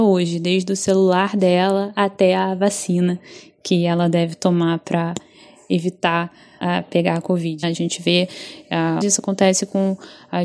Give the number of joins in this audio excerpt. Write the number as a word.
two